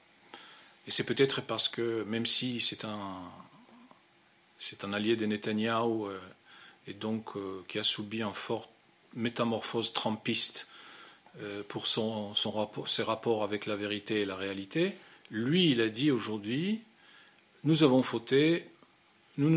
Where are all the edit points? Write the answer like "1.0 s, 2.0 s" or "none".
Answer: none